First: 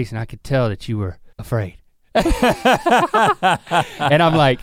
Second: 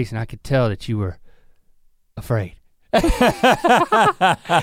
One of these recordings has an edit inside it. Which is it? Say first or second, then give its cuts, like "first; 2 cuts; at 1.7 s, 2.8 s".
first; 1 cut; at 1.3 s